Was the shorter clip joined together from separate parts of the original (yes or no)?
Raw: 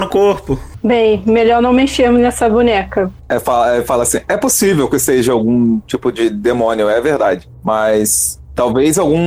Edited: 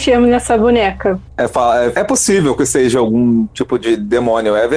yes